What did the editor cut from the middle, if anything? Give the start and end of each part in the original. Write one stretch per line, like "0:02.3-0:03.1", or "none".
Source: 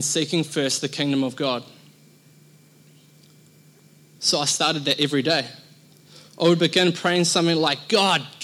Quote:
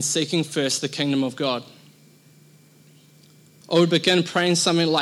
0:03.6-0:06.3